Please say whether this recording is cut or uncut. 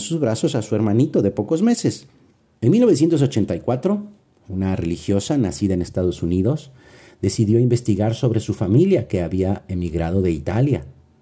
cut